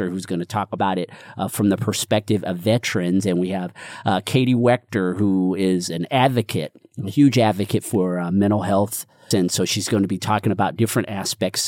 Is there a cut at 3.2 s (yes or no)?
no